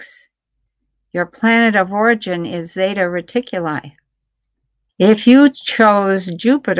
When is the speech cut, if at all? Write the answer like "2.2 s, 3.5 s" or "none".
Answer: 4.9 s